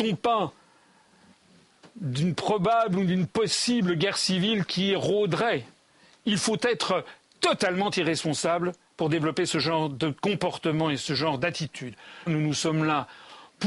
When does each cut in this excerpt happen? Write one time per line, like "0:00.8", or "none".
0:12.3